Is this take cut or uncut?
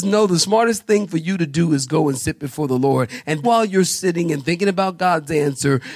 cut